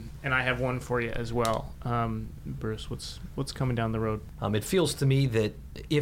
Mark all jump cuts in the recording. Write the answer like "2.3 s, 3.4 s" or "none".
2.6 s, 4.3 s